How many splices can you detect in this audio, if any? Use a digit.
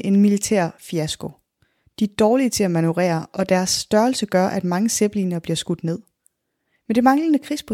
0